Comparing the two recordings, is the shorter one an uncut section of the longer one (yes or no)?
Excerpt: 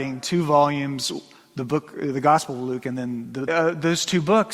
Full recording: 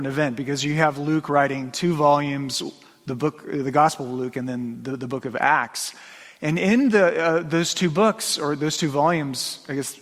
no